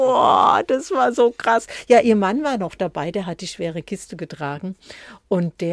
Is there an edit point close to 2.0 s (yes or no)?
no